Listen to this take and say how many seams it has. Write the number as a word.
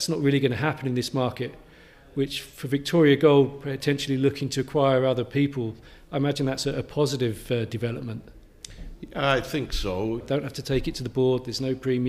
one